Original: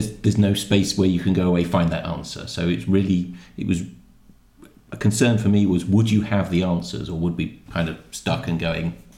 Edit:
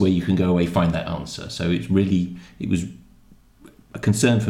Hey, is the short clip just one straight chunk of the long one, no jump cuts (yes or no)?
yes